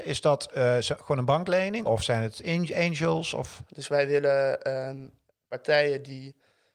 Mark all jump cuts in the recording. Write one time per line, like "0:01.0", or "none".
0:01.8
0:03.7